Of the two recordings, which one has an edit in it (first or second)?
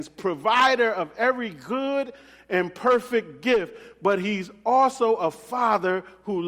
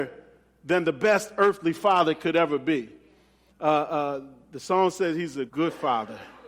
second